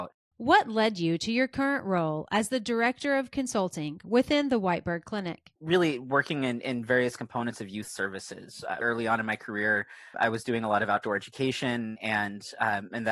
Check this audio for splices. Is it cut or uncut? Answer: cut